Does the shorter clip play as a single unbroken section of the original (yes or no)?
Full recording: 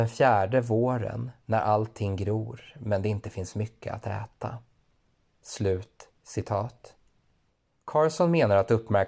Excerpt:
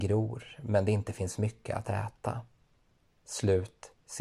yes